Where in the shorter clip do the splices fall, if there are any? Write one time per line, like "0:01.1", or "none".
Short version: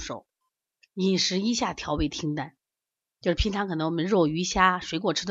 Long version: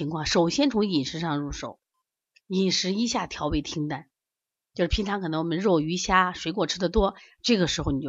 none